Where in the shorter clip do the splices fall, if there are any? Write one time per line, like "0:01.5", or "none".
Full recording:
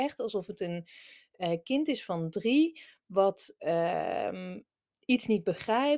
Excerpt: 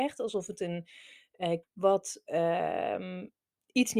0:01.6